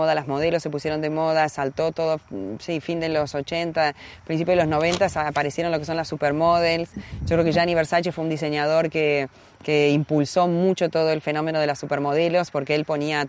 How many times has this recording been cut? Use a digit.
0